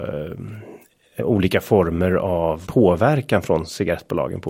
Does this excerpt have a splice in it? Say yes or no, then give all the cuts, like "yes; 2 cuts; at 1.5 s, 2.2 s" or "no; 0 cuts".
yes; 2 cuts; at 1.2 s, 2.6 s